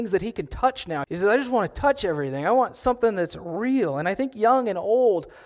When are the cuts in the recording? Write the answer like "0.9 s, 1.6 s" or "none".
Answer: 1.0 s